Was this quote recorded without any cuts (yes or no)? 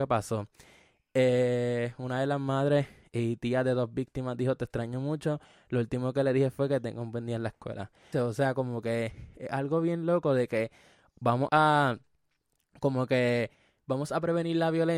no